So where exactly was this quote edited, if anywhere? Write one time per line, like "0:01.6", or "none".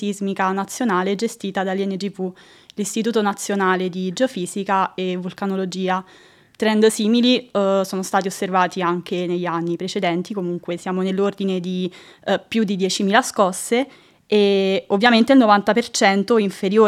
none